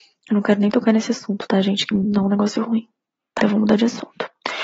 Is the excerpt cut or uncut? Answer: cut